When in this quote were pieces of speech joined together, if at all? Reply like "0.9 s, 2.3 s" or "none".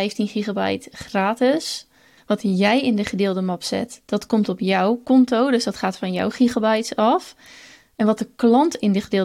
2.2 s